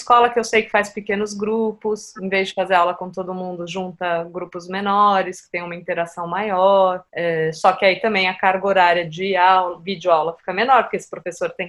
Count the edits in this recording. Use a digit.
1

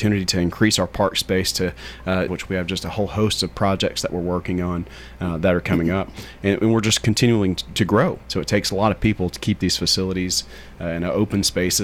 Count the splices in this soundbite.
2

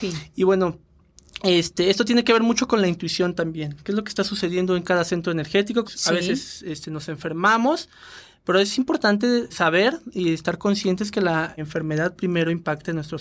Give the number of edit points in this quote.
3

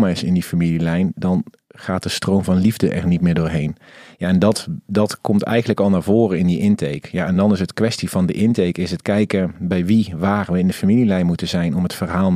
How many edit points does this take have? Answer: 0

